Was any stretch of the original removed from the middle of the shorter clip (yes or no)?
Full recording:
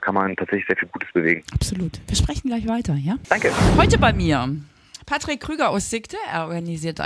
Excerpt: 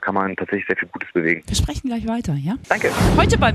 yes